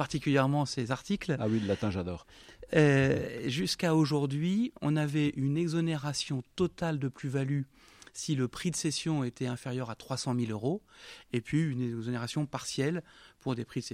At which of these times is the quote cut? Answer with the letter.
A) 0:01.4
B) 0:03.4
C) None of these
C